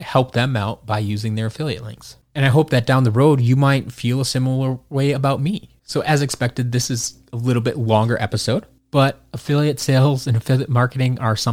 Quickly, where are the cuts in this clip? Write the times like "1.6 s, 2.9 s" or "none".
5.8 s